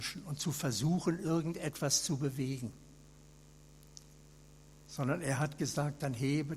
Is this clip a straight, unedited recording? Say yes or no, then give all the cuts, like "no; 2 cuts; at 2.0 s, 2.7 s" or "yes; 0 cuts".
yes; 0 cuts